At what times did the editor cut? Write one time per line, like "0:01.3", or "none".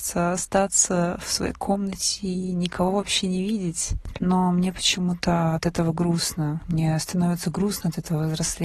0:04.1